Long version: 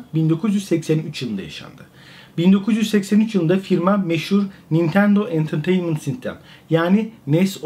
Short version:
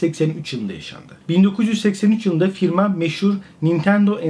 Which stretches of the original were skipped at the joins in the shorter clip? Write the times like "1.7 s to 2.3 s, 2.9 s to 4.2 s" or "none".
1.9 s to 2.3 s